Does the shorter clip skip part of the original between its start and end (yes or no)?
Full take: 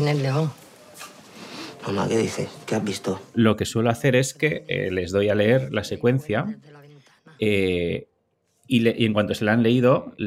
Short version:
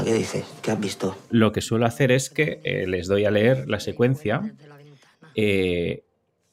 no